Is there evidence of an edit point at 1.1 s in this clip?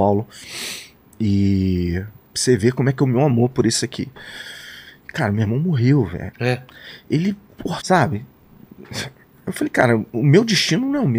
no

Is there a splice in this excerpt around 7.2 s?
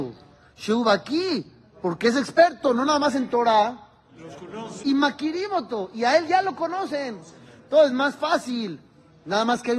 no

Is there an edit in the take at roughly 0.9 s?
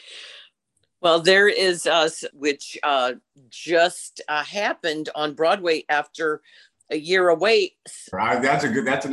no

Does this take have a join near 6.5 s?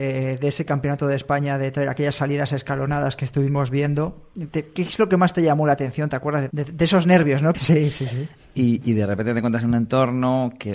yes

